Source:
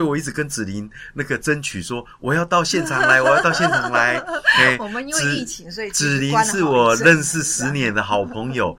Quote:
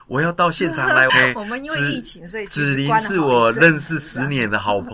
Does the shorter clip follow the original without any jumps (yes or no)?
no